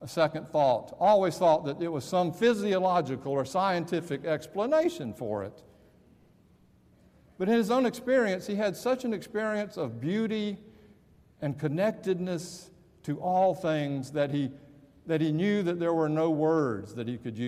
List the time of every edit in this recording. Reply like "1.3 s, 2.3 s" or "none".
none